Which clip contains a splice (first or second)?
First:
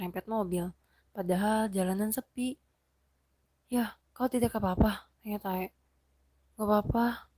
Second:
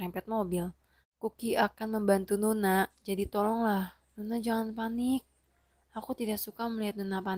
second